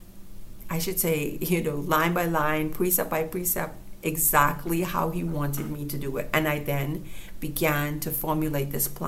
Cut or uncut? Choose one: uncut